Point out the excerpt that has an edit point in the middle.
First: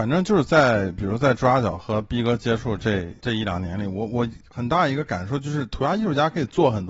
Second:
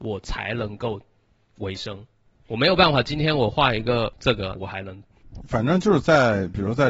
second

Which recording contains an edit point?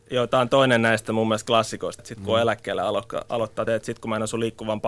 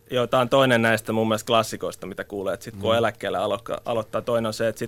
first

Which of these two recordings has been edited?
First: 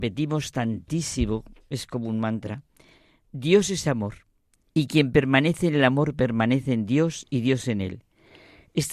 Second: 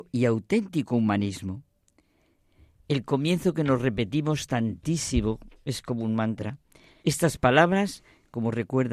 second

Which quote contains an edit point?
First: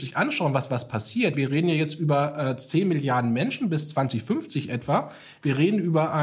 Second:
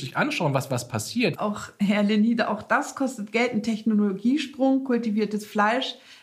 second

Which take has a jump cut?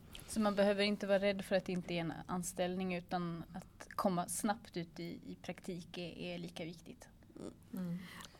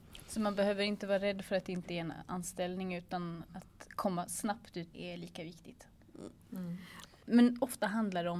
second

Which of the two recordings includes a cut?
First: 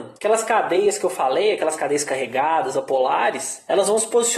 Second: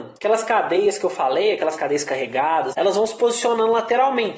second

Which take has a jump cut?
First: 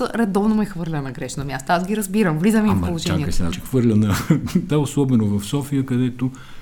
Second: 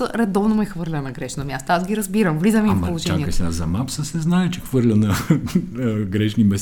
first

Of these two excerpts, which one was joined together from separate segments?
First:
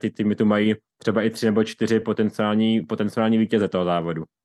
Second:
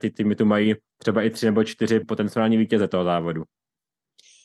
second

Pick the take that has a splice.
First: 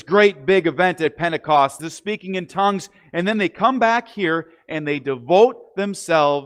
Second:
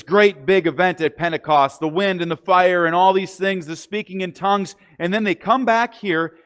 first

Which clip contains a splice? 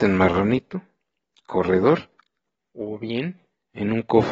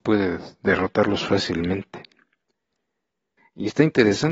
second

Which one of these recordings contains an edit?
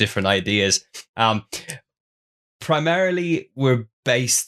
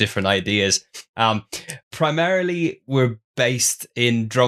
second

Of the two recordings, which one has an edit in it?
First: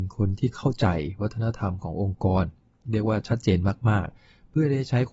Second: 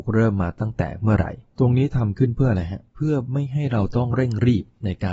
second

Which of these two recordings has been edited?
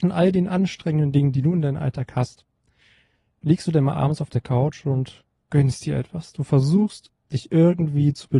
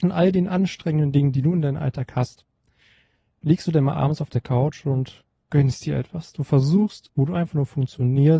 second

